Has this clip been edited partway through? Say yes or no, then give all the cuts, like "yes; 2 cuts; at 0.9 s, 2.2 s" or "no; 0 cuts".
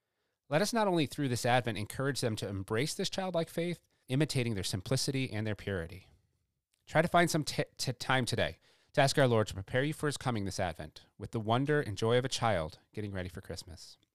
yes; 1 cut; at 4.0 s